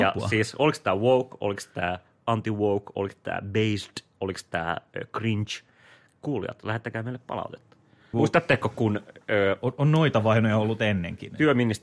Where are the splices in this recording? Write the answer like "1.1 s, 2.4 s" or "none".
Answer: 8.1 s